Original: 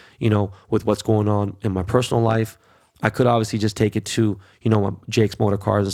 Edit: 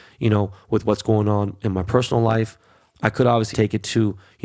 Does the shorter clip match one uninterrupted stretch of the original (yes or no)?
no